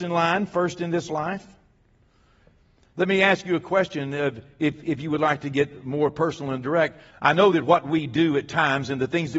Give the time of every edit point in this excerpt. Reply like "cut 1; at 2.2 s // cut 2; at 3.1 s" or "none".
cut 1; at 7.1 s